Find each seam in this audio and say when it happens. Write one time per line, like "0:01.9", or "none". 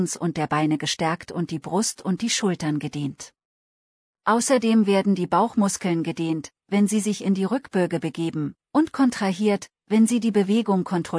none